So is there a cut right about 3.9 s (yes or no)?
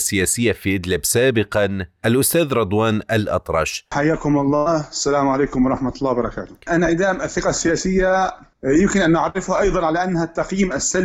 yes